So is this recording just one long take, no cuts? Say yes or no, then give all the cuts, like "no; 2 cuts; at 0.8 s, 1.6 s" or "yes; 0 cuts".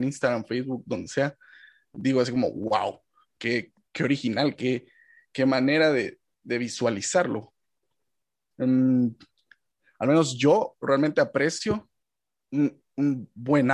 no; 1 cut; at 8.5 s